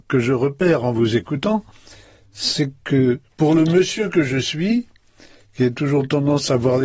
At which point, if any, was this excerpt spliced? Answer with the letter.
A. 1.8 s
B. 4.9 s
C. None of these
C